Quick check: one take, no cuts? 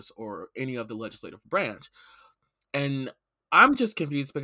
yes; 0 cuts

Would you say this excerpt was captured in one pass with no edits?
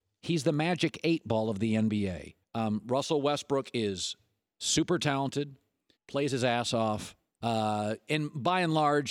no; 3 cuts; at 2.4 s, 6.0 s, 7.4 s

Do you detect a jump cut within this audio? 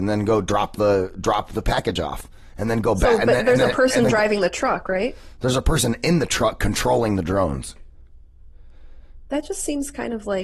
no; 0 cuts

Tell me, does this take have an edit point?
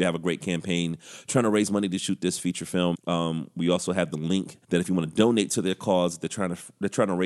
yes; 2 cuts; at 2.9 s, 4.6 s

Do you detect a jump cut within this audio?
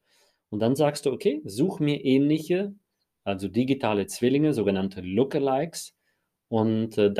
no; 0 cuts

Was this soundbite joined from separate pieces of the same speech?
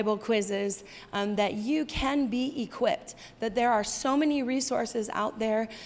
no; 0 cuts

